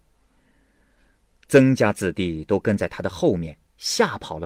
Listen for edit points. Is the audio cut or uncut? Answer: uncut